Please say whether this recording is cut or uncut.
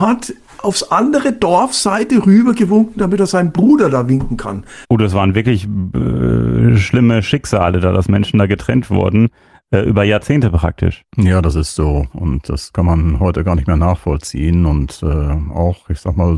cut